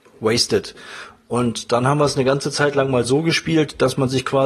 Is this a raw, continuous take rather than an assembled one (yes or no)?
yes